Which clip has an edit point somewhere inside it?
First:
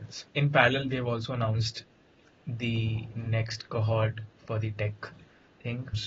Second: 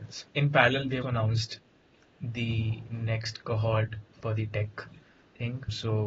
second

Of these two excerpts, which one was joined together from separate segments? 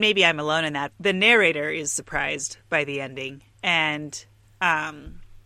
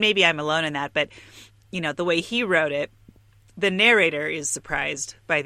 first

